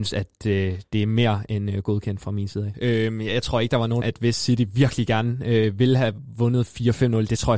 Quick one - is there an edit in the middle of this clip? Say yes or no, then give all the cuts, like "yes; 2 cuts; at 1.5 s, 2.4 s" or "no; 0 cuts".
yes; 2 cuts; at 2.7 s, 4.0 s